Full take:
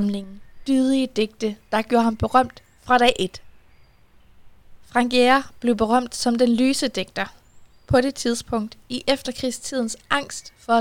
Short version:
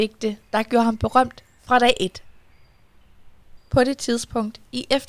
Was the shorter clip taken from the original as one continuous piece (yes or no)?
no